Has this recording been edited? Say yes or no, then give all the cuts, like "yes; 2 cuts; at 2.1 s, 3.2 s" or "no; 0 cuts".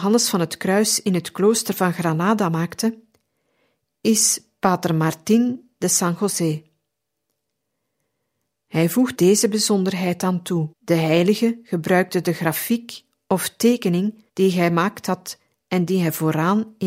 yes; 3 cuts; at 9.1 s, 10.7 s, 14.3 s